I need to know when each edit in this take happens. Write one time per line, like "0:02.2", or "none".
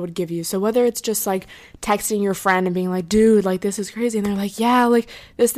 none